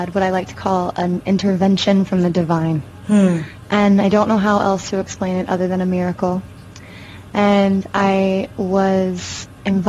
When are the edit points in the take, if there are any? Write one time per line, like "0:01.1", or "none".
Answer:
none